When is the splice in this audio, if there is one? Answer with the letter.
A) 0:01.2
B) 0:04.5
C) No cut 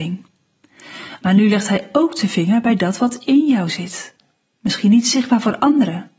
A